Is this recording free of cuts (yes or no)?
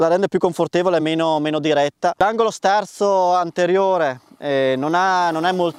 yes